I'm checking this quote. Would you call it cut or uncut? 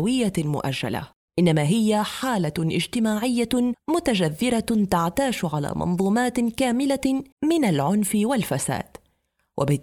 cut